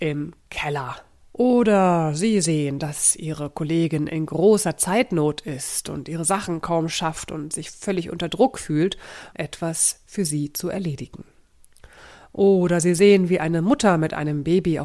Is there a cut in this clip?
yes; 2 cuts; at 1.2 s, 9.3 s

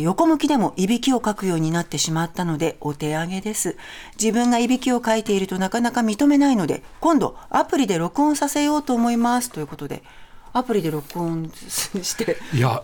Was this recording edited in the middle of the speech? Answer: no; 0 cuts

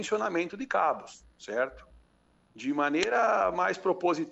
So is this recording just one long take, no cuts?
no; 1 cut; at 2.5 s

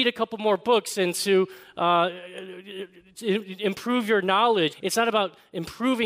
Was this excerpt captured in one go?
no; 1 cut; at 4.7 s

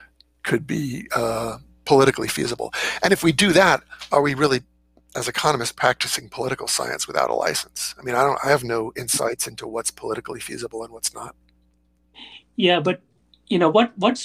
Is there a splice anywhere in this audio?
no; 0 cuts

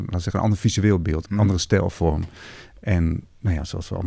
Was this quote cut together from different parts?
yes; 1 cut; at 1.2 s

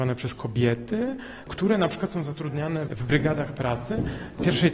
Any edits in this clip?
no; 0 cuts

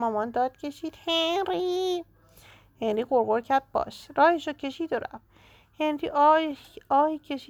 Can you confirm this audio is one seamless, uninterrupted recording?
yes; 0 cuts

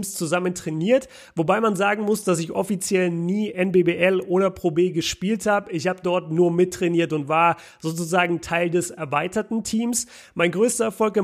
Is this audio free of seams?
yes; 0 cuts

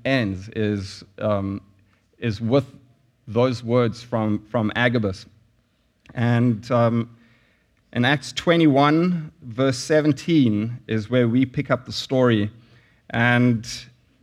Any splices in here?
no; 0 cuts

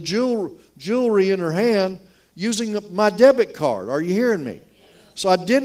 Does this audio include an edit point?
no; 0 cuts

